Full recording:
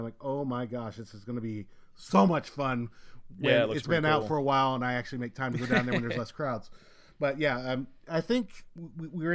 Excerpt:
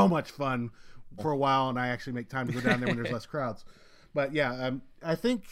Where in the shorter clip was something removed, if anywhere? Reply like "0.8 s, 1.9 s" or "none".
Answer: 1.2 s